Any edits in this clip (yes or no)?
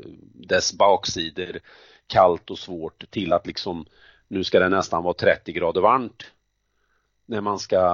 no